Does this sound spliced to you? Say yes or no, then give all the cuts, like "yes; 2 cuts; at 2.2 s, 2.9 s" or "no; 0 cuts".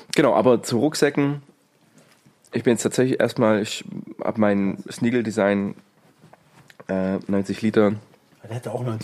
no; 0 cuts